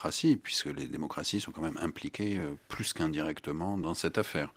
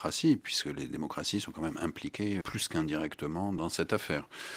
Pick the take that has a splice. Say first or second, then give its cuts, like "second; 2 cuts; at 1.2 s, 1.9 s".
second; 1 cut; at 2.4 s